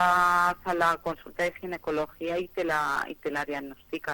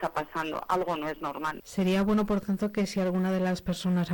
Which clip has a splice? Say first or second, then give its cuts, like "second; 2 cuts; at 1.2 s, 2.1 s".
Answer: second; 1 cut; at 1.6 s